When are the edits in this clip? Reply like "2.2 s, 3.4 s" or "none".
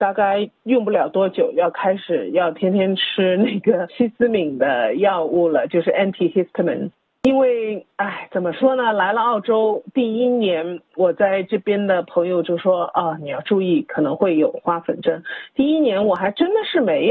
none